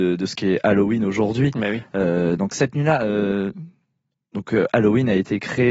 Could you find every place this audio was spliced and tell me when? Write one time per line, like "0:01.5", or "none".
none